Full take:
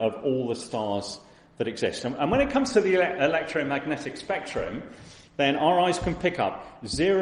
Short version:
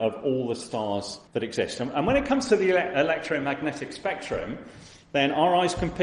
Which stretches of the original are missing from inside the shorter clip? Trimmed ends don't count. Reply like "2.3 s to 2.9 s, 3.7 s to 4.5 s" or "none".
1.3 s to 1.5 s